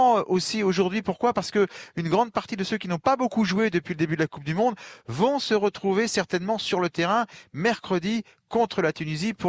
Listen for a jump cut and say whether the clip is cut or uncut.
uncut